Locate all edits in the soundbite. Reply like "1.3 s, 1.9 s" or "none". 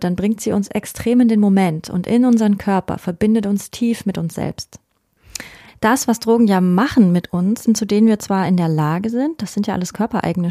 5.7 s, 7.7 s

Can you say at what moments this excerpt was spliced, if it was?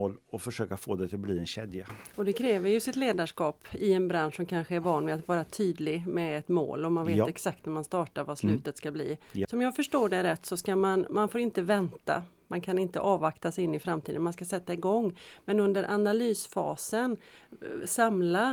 9.4 s

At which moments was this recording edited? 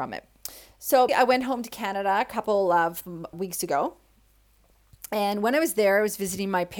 1.1 s, 3.3 s

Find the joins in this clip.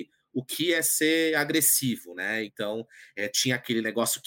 2.5 s

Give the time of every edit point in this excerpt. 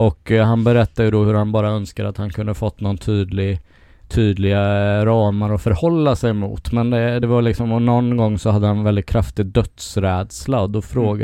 none

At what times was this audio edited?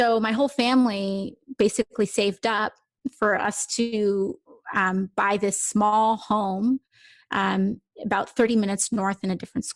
none

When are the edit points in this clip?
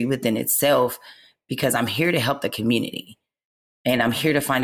none

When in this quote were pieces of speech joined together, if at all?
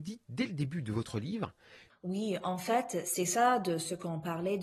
1.9 s

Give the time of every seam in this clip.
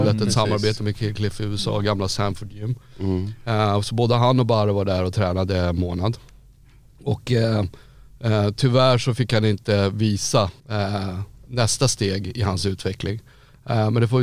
10.6 s

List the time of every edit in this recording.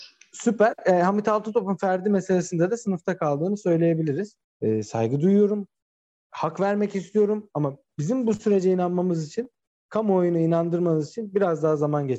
4.4 s

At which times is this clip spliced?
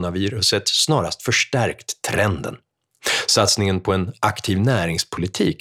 none

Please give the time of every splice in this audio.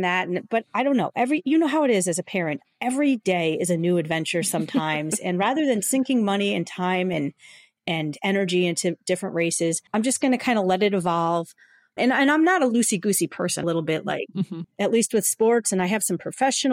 9.9 s, 13.6 s, 14.6 s

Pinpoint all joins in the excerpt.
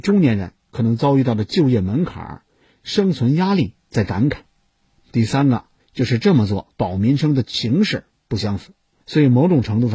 6.7 s, 8.9 s

